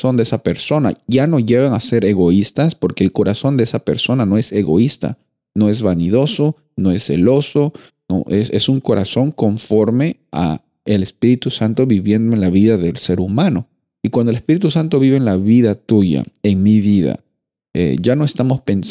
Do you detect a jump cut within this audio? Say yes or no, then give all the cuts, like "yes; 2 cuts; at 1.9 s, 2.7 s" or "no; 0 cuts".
no; 0 cuts